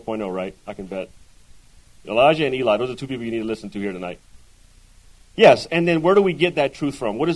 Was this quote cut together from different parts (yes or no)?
yes